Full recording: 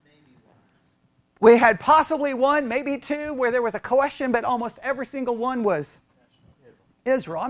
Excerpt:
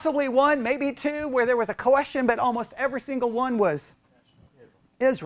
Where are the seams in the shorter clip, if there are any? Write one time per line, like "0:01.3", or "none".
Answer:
none